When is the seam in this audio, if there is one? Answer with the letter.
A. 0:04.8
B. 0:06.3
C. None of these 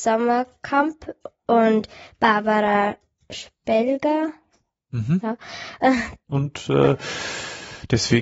B